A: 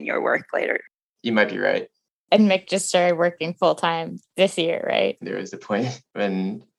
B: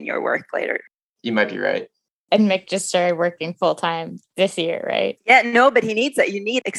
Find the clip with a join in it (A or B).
A